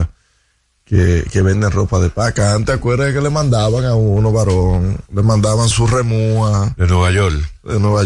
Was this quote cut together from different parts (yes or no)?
yes